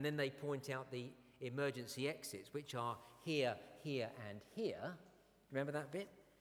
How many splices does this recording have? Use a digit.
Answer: 0